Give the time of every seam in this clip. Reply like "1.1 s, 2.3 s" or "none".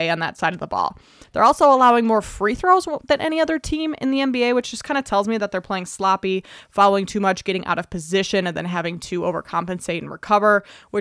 none